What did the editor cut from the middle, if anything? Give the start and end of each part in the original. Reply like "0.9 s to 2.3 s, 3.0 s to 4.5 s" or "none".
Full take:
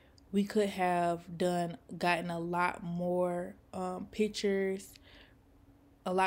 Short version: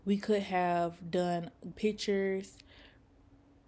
2.0 s to 4.1 s